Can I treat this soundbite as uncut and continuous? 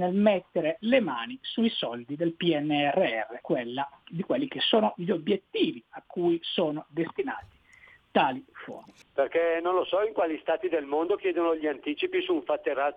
no; 2 cuts; at 3.4 s, 9.0 s

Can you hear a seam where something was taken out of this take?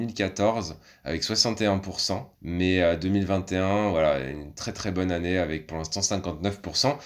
yes; 1 cut; at 2.3 s

